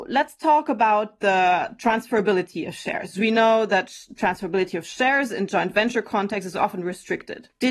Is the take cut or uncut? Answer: uncut